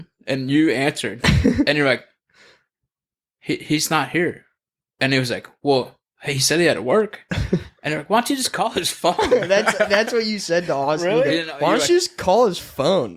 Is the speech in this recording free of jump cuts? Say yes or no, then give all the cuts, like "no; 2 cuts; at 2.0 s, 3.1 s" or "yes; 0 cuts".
yes; 0 cuts